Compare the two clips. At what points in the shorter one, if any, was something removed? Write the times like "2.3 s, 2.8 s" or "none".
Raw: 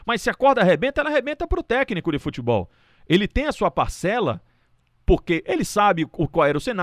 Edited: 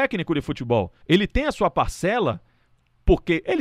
1.0 s